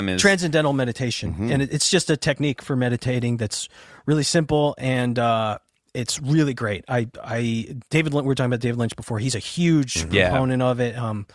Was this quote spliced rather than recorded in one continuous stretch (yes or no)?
no